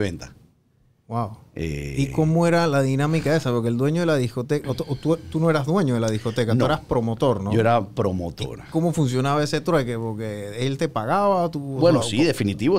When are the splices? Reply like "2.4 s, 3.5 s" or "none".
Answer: none